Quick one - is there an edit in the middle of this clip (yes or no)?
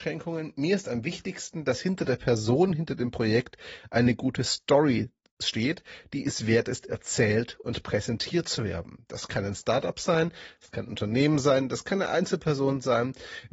no